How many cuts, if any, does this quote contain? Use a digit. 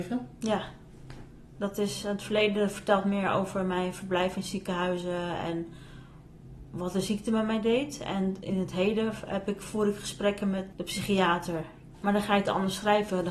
2